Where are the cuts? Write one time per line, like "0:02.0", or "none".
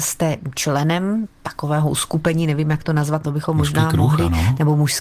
0:03.2